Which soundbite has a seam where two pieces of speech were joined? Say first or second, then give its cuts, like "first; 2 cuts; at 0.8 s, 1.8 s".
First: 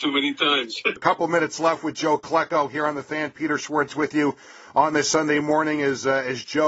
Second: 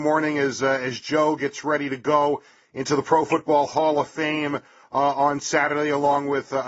first; 1 cut; at 1.0 s